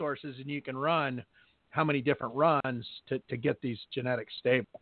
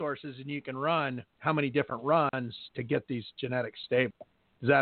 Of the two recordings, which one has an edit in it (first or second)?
second